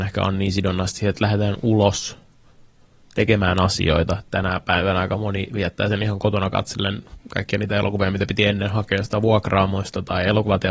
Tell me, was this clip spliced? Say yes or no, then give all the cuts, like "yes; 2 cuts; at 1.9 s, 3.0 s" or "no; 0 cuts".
no; 0 cuts